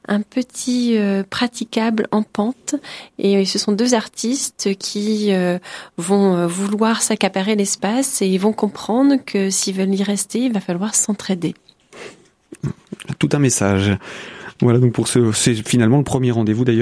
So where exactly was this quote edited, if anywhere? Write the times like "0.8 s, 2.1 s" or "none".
none